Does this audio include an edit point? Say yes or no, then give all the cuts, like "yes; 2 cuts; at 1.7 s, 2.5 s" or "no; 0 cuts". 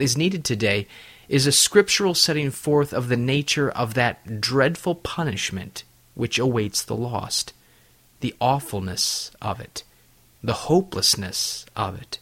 no; 0 cuts